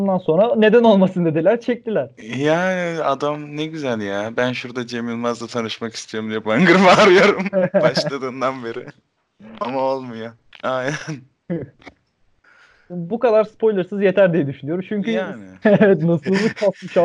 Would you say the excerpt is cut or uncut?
cut